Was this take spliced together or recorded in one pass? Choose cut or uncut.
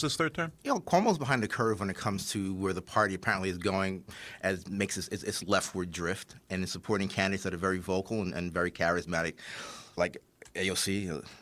cut